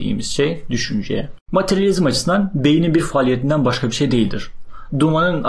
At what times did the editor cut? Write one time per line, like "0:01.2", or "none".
0:01.4

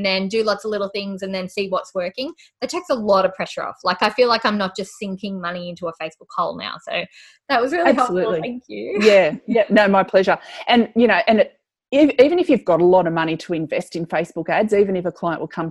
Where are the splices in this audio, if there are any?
none

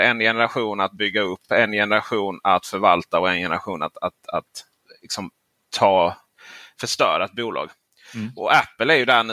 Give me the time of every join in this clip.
none

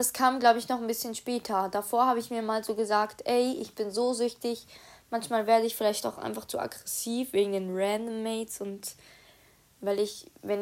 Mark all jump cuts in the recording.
none

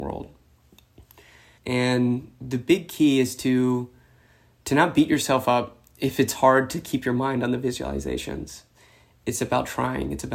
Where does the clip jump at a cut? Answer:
0:01.6

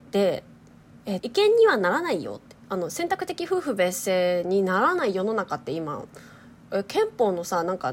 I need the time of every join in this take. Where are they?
0:01.2

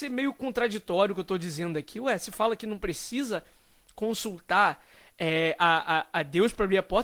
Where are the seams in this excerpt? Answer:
none

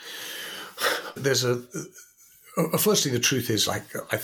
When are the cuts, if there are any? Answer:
0:01.2

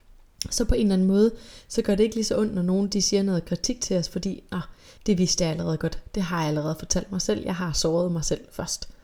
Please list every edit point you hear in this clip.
0:05.0

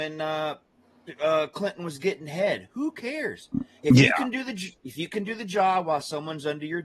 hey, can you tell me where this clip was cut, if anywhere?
none

